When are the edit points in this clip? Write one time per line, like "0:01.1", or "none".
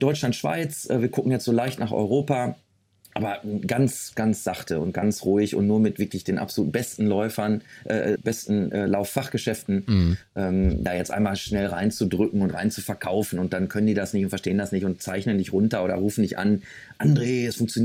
0:08.2
0:10.9